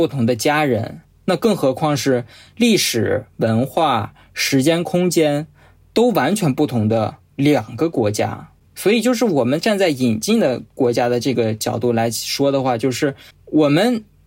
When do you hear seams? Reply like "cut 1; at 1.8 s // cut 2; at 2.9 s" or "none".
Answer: none